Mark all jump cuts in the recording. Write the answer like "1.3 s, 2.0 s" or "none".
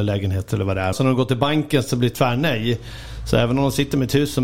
0.9 s